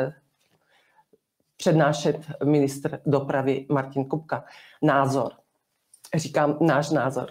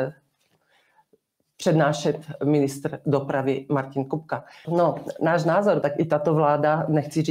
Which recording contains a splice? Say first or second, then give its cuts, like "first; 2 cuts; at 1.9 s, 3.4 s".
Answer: second; 2 cuts; at 4.6 s, 5.8 s